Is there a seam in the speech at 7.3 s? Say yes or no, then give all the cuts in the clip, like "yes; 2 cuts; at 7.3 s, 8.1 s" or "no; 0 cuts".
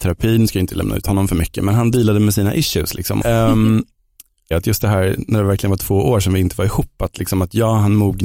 no; 2 cuts; at 3.2 s, 4.5 s